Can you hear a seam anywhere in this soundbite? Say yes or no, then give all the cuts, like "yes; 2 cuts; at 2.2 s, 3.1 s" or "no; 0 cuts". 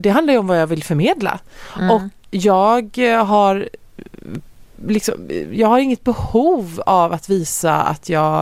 yes; 1 cut; at 2.2 s